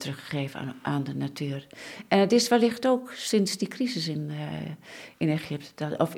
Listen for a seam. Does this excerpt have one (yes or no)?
no